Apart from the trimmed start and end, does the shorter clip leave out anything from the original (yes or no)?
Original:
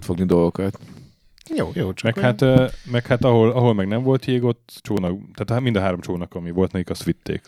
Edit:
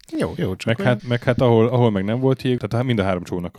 yes